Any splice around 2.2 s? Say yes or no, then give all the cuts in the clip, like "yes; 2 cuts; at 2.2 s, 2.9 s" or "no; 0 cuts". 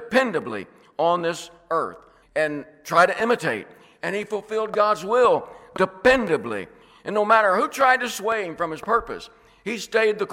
yes; 1 cut; at 2.2 s